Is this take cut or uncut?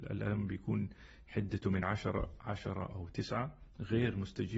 uncut